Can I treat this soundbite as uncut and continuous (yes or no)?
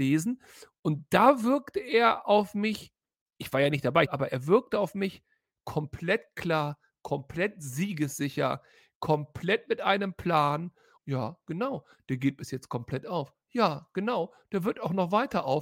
no